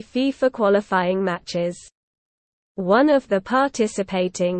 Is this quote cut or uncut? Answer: uncut